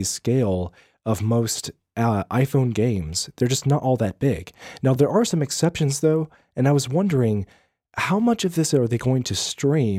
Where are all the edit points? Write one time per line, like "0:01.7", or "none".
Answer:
none

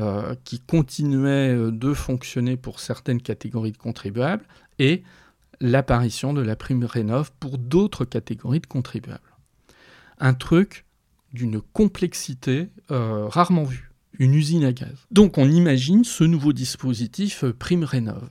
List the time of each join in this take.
0:15.1

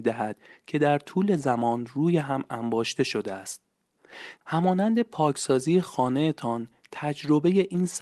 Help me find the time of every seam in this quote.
0:04.4

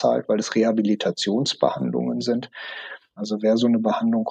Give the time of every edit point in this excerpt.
0:03.2

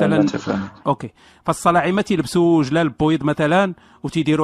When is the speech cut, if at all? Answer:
none

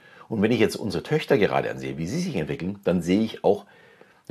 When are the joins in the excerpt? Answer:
none

